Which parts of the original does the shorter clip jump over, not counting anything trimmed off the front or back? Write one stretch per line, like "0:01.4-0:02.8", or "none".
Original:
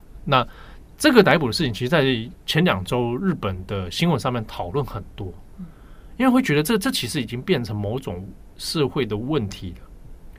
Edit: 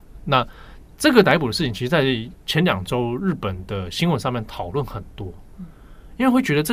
none